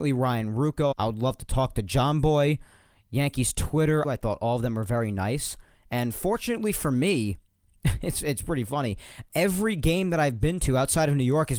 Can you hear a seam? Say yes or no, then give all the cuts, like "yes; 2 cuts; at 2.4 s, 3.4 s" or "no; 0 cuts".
yes; 2 cuts; at 0.9 s, 4.0 s